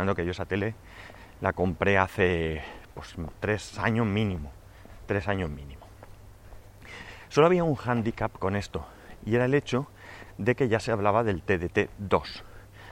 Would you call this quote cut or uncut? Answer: uncut